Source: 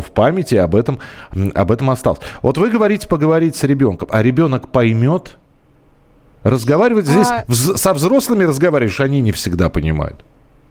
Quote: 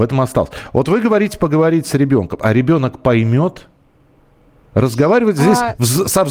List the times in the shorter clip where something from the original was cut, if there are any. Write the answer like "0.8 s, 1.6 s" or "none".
none